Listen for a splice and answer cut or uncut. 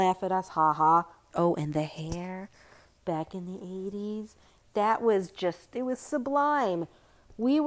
cut